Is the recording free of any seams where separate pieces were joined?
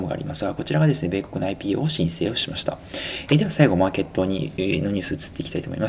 no; 1 cut; at 3.3 s

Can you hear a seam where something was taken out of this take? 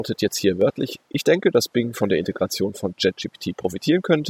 no; 0 cuts

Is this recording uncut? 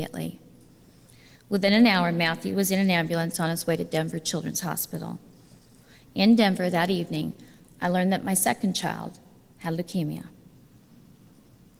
yes; 0 cuts

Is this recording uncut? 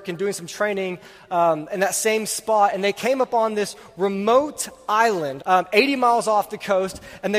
no; 1 cut; at 5.4 s

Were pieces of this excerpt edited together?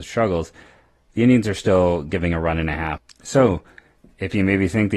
no; 0 cuts

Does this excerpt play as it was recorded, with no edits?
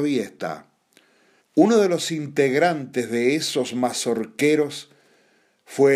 no; 1 cut; at 1.4 s

